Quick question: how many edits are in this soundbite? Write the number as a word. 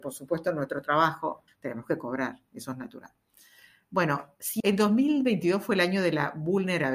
two